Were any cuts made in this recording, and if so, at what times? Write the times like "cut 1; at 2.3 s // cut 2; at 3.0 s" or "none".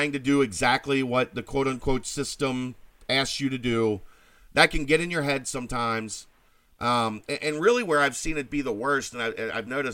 none

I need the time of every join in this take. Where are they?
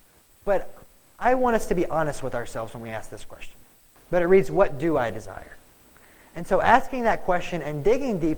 cut 1; at 4.0 s

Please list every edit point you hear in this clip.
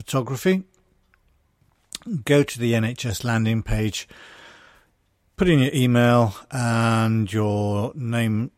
none

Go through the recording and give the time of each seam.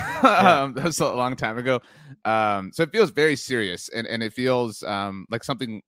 none

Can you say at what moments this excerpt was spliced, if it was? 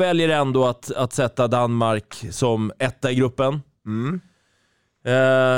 none

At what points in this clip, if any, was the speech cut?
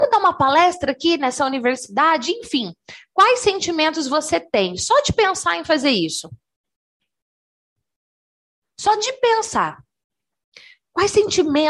none

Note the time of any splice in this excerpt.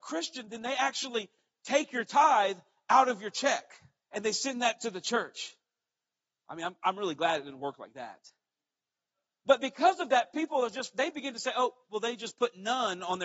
cut 1; at 4.0 s

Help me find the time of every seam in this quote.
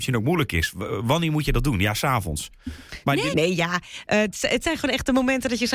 cut 1; at 3.3 s

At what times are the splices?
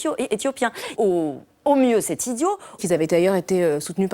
cut 1; at 1.0 s // cut 2; at 2.8 s

